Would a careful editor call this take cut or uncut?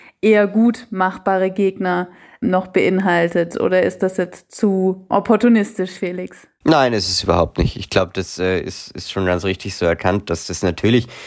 uncut